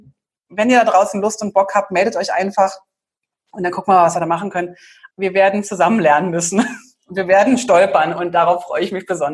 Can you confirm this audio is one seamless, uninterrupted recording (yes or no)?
no